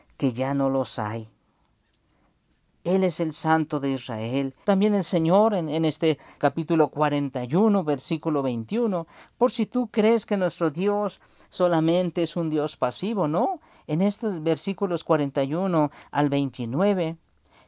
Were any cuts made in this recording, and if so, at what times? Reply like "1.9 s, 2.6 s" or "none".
2.7 s, 4.6 s, 6.4 s